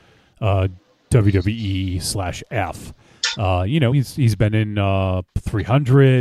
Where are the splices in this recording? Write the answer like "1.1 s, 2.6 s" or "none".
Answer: none